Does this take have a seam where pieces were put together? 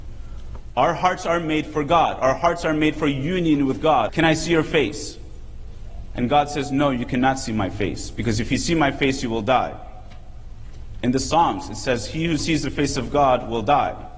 yes; 1 cut; at 4.1 s

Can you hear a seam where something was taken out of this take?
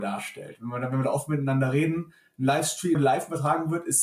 yes; 1 cut; at 2.9 s

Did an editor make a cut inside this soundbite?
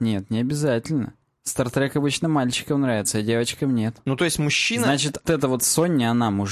yes; 1 cut; at 5.3 s

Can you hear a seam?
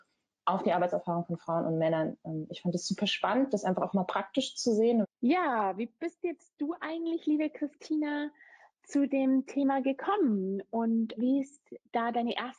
yes; 2 cuts; at 5.0 s, 11.2 s

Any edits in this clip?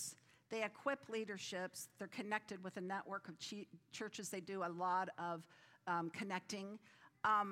no; 0 cuts

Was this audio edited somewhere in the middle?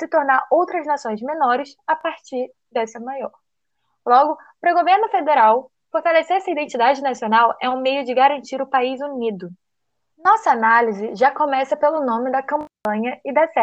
yes; 1 cut; at 10.1 s

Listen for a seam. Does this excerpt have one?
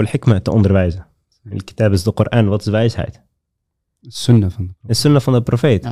no; 0 cuts

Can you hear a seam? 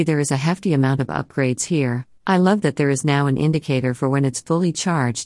yes; 1 cut; at 2.2 s

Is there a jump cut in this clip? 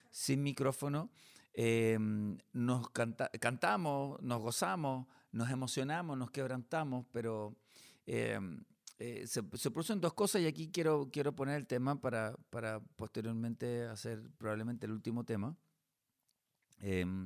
no; 0 cuts

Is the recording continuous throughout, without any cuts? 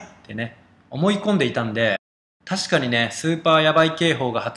yes; 0 cuts

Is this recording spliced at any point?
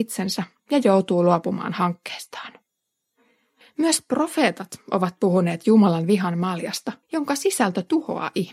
yes; 2 cuts; at 3.6 s, 7.0 s

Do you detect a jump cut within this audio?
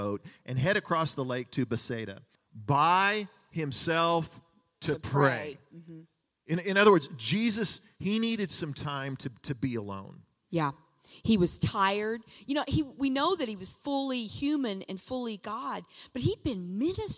yes; 1 cut; at 2.4 s

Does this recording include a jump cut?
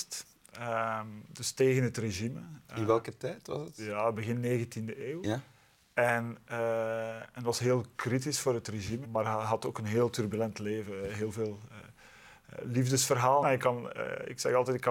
yes; 2 cuts; at 9.0 s, 13.4 s

